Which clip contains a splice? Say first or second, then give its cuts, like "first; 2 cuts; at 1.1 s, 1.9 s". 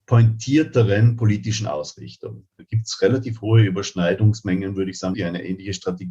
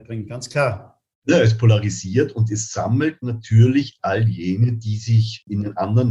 first; 2 cuts; at 2.6 s, 5.1 s